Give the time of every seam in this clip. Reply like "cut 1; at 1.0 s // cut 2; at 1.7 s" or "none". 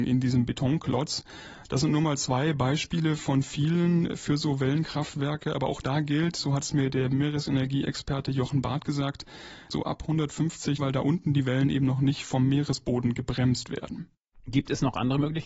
cut 1; at 9.7 s // cut 2; at 10.8 s